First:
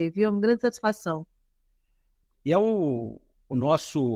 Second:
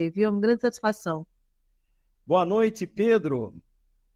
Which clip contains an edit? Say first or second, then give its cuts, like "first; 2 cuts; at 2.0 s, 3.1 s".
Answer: first; 1 cut; at 2.2 s